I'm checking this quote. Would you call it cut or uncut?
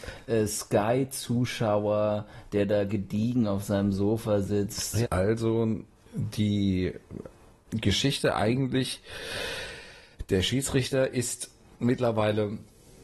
cut